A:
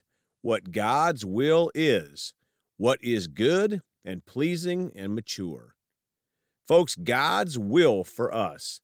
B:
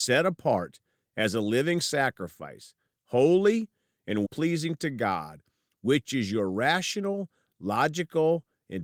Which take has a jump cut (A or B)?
B